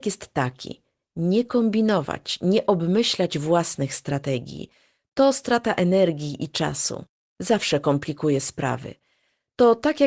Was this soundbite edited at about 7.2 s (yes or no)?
no